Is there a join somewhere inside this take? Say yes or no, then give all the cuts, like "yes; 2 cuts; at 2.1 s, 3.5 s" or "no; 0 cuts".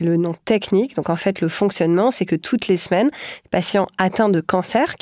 no; 0 cuts